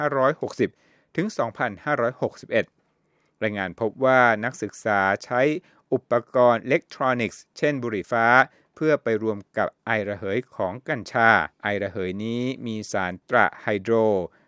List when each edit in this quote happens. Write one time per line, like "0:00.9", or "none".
0:08.0
0:11.5
0:13.2

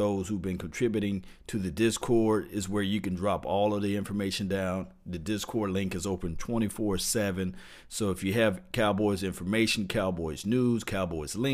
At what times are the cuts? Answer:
none

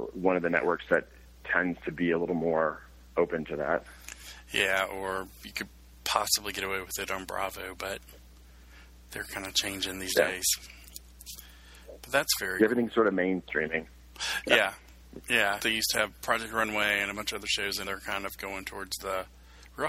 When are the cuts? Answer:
0:15.6
0:17.8

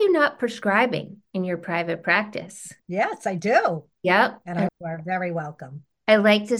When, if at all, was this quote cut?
0:02.8
0:04.7

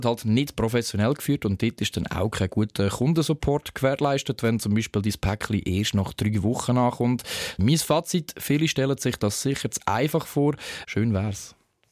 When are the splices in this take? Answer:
0:07.6
0:10.8

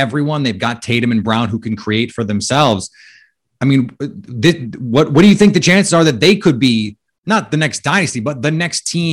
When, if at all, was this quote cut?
none

